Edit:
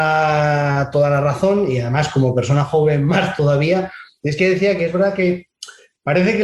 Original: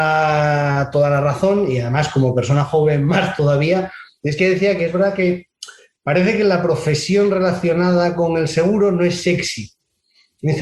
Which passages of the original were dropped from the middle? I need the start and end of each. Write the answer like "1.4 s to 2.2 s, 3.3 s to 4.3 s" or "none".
none